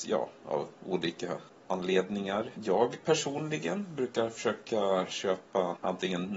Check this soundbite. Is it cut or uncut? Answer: cut